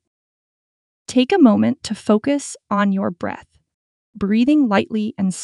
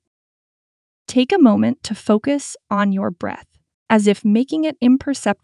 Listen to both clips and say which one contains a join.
second; 1 cut; at 3.9 s

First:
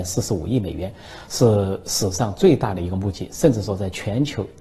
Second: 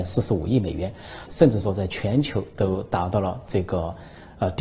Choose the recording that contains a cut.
second; 1 cut; at 1.3 s

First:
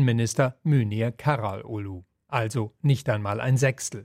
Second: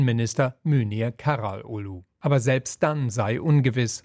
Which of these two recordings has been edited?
second; 1 cut; at 2.2 s

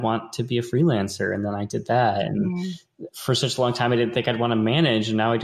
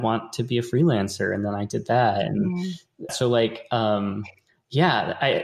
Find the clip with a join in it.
second; 1 cut; at 3.1 s

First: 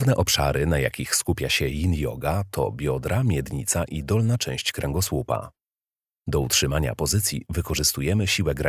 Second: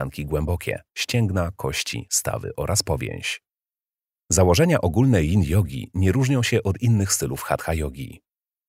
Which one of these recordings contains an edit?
second; 1 cut; at 4.2 s

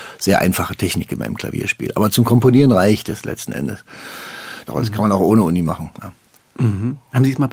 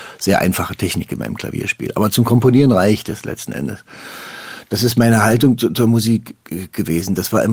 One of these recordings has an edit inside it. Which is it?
first; 1 cut; at 4.7 s

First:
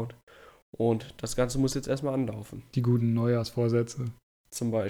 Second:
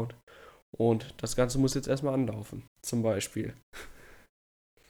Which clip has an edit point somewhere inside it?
second; 1 cut; at 2.7 s

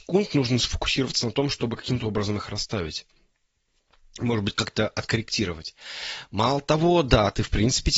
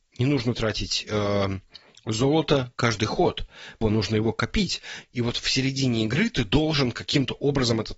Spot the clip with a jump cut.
second; 2 cuts; at 3.8 s, 5.0 s

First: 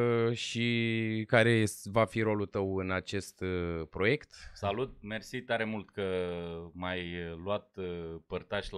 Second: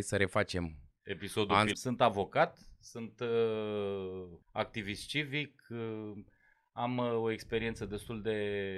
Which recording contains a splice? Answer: second; 2 cuts; at 1.7 s, 4.4 s

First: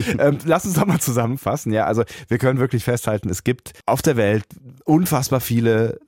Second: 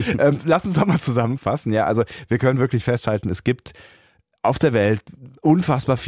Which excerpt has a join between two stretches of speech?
first; 1 cut; at 3.8 s

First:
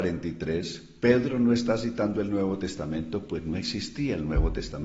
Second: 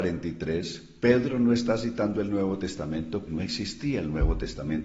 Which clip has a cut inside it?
second; 1 cut; at 3.3 s

